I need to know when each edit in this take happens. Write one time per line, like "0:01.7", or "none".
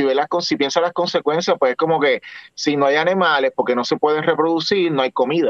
none